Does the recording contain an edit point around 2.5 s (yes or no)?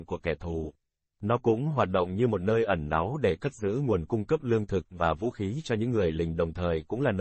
no